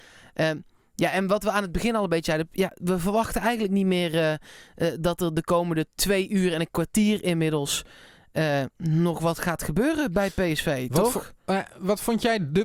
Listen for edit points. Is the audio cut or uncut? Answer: uncut